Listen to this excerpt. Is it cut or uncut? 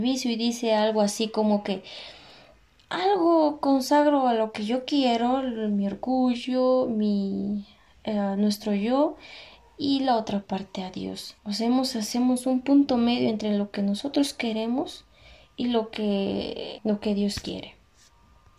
cut